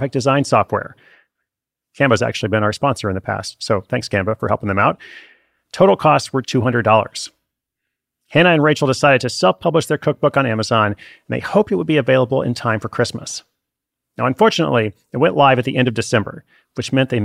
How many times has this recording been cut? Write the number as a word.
one